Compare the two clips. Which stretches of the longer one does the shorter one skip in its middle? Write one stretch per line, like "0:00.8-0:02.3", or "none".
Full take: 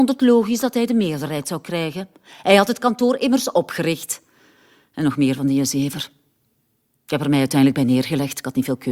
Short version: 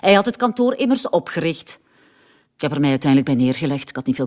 0:04.9-0:06.9